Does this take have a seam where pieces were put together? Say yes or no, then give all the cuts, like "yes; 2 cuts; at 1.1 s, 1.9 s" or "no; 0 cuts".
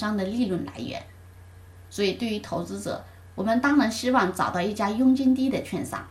no; 0 cuts